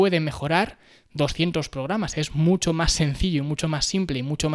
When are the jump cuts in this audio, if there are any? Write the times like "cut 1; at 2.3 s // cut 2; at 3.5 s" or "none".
none